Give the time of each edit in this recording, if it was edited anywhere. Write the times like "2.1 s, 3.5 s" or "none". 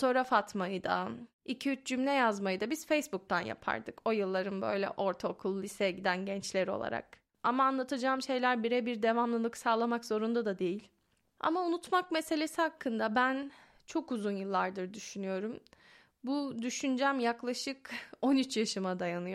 7.3 s

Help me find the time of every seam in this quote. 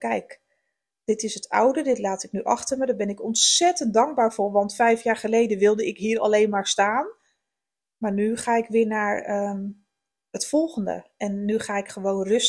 none

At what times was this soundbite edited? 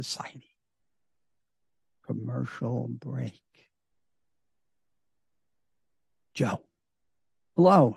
none

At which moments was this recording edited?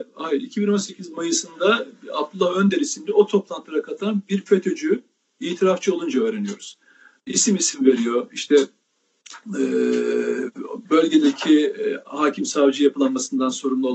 none

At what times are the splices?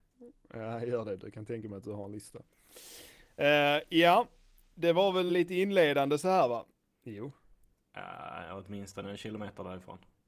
5.3 s, 6.9 s

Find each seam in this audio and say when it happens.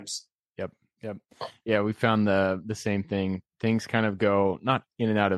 none

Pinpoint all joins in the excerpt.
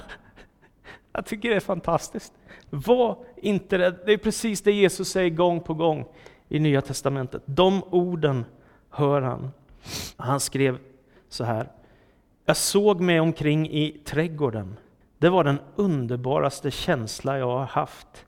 10.1 s, 15.0 s

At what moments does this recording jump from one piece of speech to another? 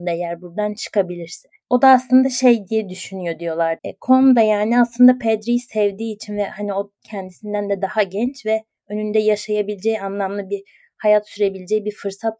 3.8 s

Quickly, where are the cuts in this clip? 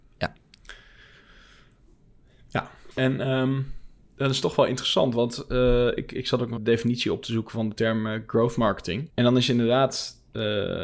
2.9 s, 6.6 s, 9.1 s

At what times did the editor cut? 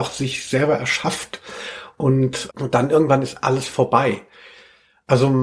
2.5 s

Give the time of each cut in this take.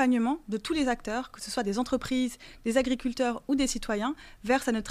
none

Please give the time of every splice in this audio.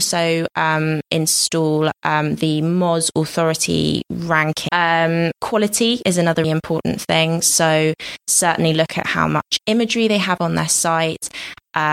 4.7 s, 6.4 s

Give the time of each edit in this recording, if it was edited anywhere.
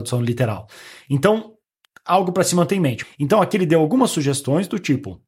3.0 s

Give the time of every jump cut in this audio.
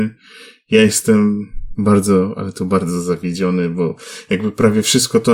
1.7 s

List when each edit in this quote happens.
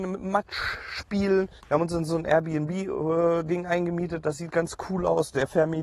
1.6 s

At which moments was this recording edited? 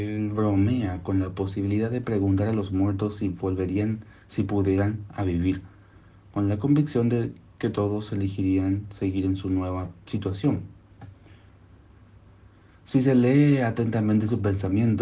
none

